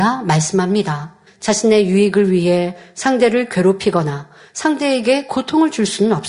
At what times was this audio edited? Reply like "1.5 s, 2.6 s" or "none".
1.3 s